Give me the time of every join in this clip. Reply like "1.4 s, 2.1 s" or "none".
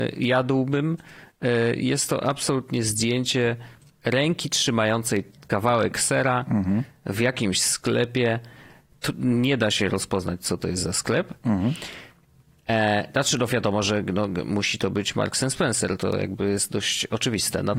3.9 s